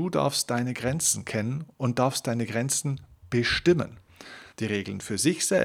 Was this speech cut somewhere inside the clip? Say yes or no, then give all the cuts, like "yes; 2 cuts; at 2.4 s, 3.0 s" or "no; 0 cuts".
yes; 1 cut; at 4.5 s